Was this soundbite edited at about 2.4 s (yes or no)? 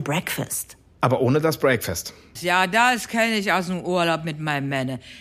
yes